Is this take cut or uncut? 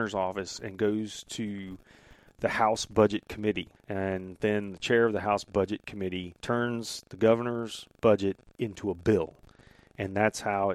cut